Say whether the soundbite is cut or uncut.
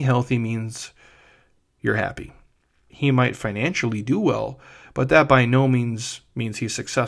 cut